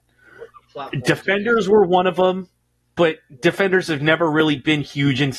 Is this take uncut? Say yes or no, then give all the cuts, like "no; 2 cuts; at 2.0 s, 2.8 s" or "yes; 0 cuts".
yes; 0 cuts